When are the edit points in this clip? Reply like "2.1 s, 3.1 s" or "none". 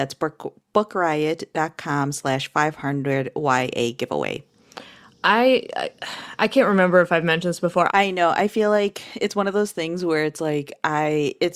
7.9 s